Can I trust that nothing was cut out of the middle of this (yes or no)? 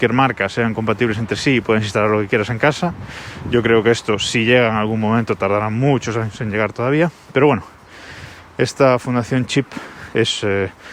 yes